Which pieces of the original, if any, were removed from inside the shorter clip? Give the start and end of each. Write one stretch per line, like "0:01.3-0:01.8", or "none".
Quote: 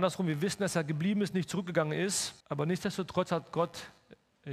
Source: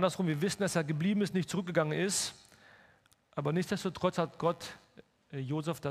0:02.4-0:03.3